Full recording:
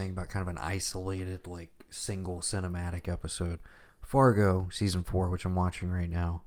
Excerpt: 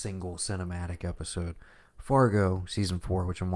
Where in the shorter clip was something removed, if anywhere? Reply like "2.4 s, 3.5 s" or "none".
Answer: none